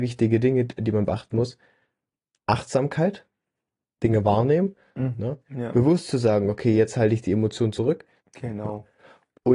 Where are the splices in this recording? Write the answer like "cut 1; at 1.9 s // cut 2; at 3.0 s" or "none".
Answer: cut 1; at 5.2 s // cut 2; at 8.2 s